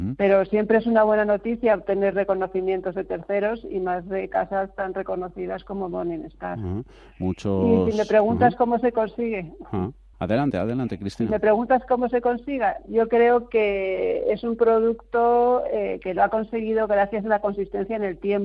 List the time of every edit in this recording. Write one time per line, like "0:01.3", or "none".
0:10.1